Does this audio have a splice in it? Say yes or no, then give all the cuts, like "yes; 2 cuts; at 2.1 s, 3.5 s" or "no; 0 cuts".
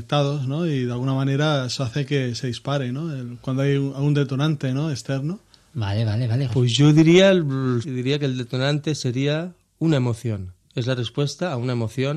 yes; 2 cuts; at 6.5 s, 7.8 s